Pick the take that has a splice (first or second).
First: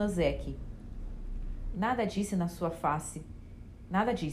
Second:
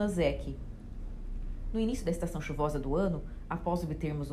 first